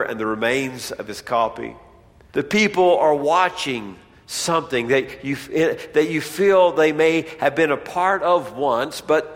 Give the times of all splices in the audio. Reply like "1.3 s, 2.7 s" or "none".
2.3 s